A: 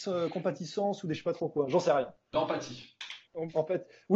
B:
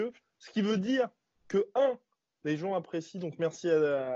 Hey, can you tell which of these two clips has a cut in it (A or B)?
A